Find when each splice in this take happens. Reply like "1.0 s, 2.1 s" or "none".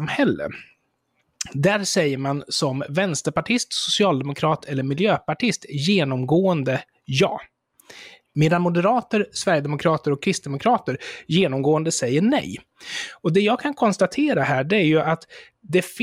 none